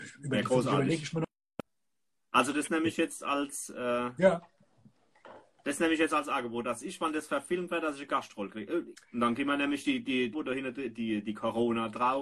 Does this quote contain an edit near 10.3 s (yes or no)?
yes